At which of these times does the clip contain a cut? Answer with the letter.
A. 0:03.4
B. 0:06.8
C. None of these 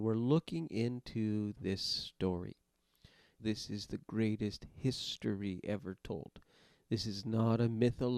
A